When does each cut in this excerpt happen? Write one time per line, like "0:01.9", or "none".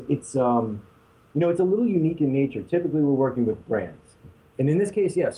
none